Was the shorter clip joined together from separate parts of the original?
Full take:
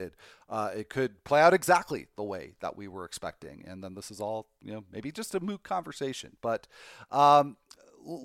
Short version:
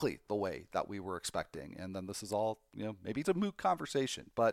yes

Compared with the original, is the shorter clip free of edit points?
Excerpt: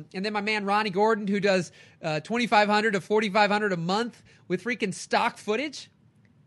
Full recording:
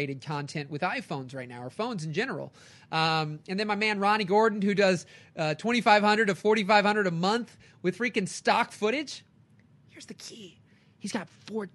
yes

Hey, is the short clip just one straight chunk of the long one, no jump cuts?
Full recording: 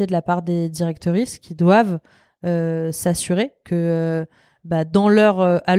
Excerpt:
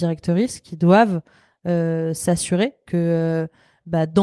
yes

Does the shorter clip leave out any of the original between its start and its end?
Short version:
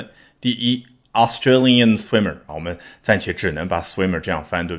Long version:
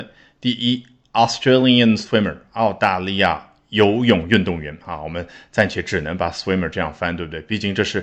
yes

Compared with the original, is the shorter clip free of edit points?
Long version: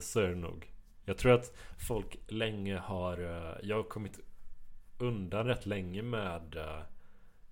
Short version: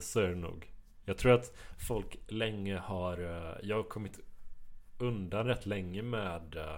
yes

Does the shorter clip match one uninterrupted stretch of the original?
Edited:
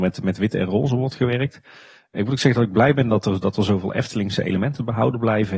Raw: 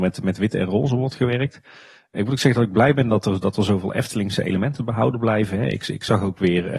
yes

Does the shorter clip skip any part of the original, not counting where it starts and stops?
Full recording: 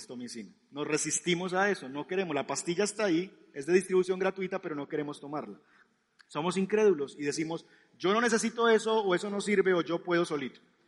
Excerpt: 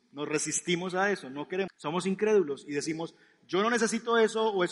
yes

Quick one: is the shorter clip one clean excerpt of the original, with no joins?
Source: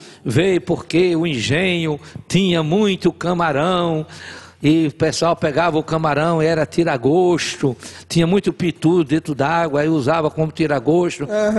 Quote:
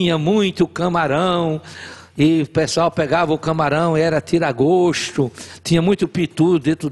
yes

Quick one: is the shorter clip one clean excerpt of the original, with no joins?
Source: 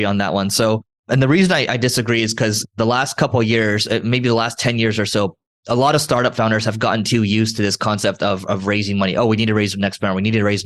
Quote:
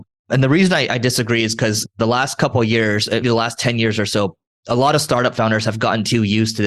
no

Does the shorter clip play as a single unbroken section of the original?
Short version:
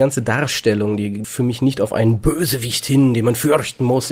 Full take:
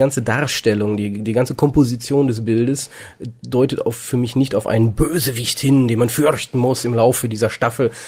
no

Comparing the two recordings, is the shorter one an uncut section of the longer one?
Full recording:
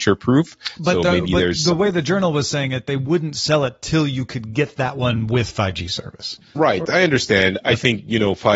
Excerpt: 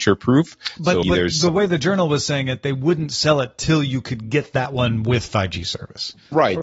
no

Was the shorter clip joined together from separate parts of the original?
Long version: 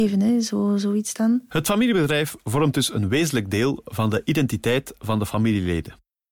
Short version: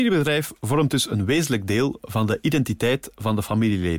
no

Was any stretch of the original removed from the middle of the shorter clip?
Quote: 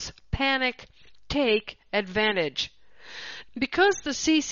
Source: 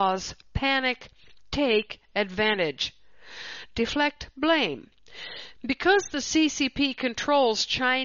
yes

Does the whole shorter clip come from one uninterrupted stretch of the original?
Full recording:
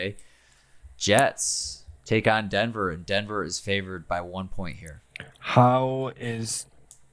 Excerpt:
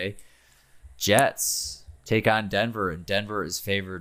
yes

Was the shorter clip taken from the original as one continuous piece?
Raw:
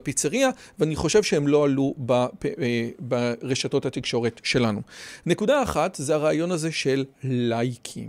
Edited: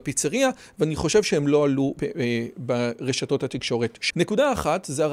no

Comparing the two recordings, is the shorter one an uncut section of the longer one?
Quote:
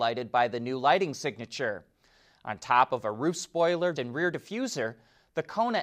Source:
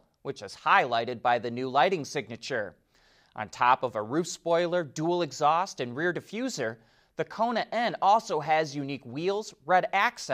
no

